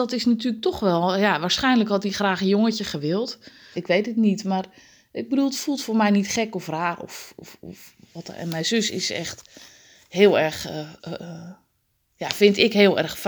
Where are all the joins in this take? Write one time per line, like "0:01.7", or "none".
0:03.7